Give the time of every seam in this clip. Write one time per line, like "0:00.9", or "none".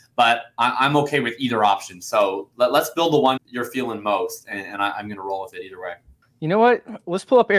0:03.4